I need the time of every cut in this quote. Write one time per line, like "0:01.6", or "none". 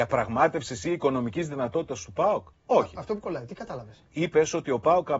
none